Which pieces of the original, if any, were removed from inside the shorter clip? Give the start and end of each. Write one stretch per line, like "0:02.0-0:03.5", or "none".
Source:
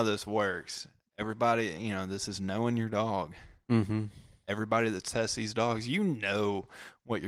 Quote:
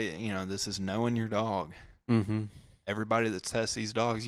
none